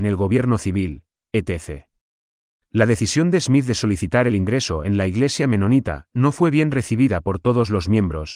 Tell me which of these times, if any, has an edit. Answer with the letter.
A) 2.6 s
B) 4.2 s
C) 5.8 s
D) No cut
A